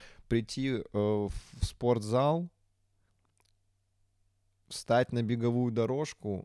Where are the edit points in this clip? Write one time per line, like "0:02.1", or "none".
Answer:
none